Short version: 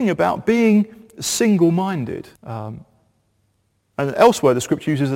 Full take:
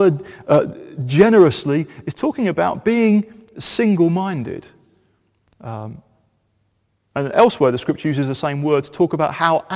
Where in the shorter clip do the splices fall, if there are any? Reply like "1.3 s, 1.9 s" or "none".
2.4 s